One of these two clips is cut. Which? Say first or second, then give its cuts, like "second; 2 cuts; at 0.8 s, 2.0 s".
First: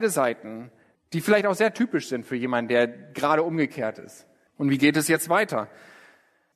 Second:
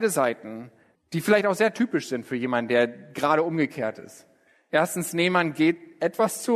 first; 1 cut; at 4.5 s